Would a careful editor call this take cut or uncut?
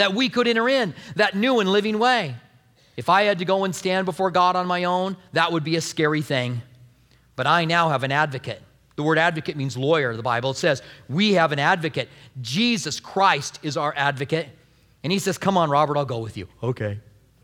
uncut